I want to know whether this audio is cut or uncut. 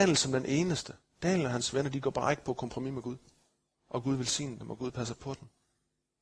cut